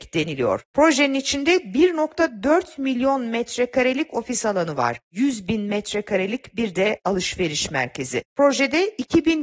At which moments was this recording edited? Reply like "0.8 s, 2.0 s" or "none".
none